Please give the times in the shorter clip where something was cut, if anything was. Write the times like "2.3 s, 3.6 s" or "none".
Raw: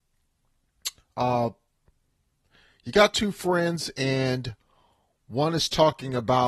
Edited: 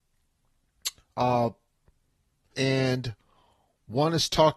2.5 s